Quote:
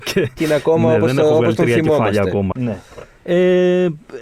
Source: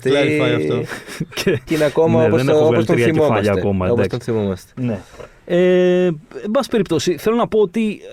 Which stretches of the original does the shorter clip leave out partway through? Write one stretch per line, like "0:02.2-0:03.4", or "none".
0:03.8-0:04.7